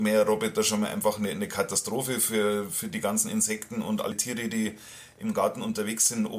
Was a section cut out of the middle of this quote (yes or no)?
no